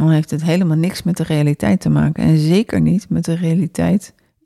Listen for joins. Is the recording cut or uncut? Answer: uncut